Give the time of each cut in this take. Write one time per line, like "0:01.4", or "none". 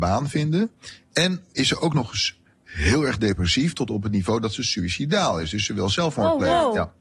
none